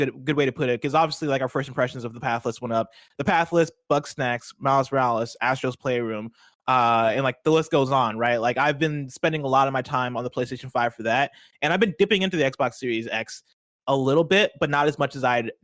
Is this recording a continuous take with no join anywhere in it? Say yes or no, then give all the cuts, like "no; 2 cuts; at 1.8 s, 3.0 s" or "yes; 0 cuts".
yes; 0 cuts